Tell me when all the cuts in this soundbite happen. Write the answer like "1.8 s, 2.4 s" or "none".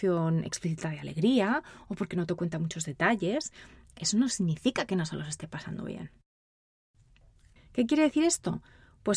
7.6 s